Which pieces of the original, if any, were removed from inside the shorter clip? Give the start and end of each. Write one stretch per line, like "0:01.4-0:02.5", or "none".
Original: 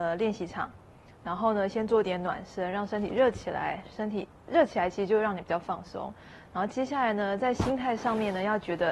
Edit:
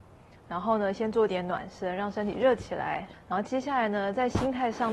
0:03.9-0:06.4

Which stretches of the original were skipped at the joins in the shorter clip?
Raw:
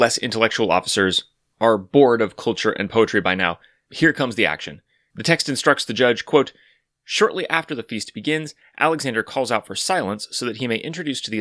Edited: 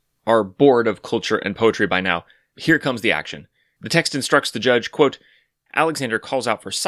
0:07.0-0:08.7

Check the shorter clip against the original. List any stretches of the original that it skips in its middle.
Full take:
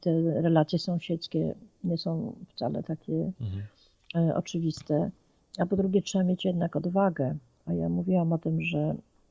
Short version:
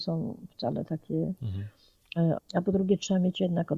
0:04.3-0:05.4

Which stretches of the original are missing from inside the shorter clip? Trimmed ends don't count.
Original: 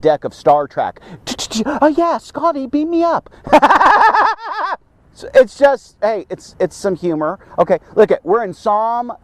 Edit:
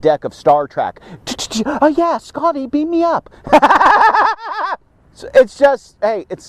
none

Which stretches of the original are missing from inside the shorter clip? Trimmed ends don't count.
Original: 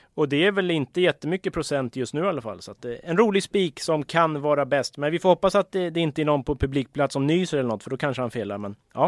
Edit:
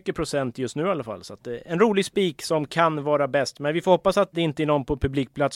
0:05.7-0:05.9

